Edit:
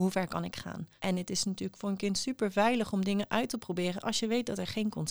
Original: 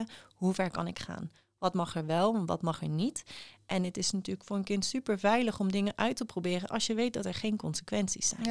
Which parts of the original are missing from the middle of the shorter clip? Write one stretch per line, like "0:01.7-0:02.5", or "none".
0:01.4-0:03.7